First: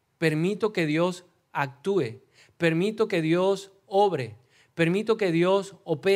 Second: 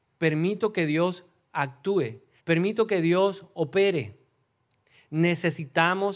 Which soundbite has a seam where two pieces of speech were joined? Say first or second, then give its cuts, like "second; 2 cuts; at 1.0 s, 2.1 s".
second; 1 cut; at 2.4 s